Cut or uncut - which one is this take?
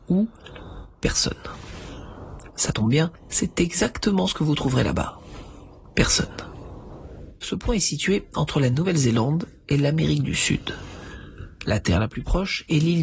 uncut